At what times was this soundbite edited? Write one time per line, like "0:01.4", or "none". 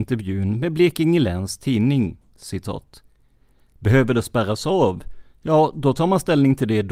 none

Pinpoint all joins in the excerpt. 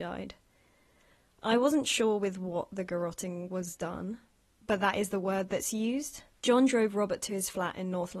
0:06.4

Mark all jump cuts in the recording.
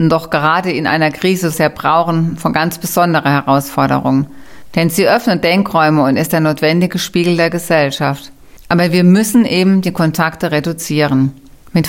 0:01.5

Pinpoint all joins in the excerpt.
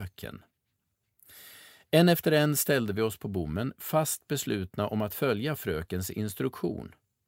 none

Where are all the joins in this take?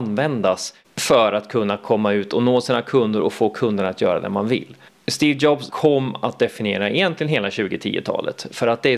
0:05.7

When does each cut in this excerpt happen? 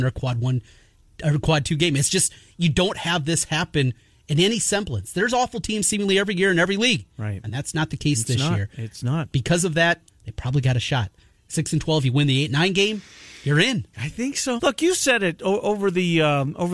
0:10.1
0:14.6

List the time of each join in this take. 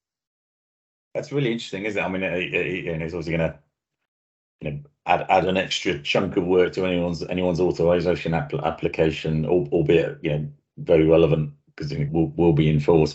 0:12.1

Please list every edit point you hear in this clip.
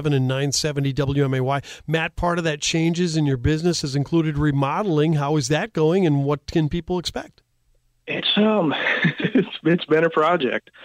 none

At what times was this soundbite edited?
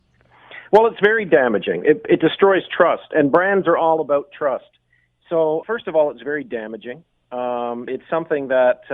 0:05.6
0:07.9

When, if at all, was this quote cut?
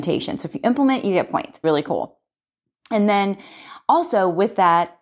0:01.6

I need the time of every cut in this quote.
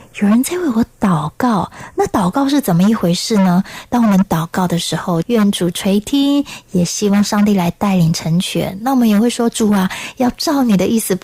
0:05.2

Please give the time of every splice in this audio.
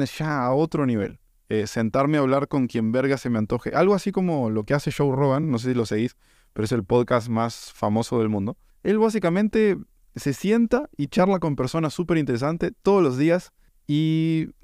none

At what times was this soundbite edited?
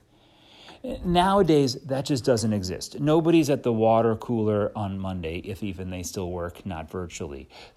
none

